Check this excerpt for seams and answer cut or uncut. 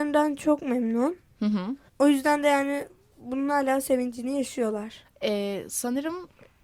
cut